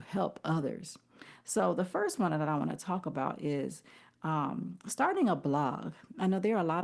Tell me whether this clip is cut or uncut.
uncut